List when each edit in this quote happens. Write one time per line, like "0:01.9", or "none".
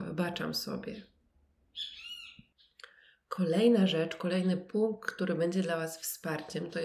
none